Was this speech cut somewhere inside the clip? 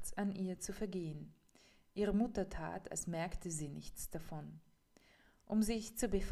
no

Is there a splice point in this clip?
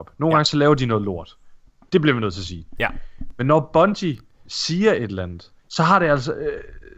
yes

